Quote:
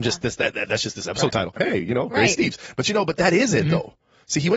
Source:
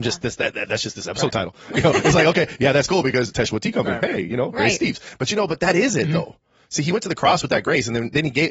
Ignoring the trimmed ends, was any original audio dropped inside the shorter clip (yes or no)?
yes